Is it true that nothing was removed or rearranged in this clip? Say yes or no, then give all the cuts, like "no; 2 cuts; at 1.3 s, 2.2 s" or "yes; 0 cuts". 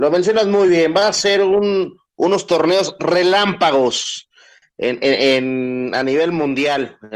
yes; 0 cuts